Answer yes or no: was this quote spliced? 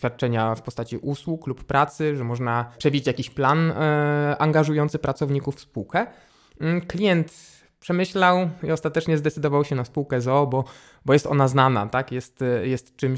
no